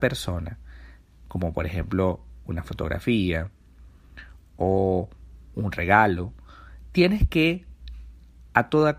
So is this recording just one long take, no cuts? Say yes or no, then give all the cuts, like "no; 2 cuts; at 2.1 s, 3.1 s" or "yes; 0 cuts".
yes; 0 cuts